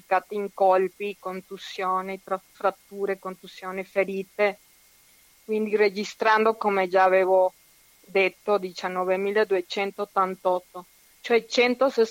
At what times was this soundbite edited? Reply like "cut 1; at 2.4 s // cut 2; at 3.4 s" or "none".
none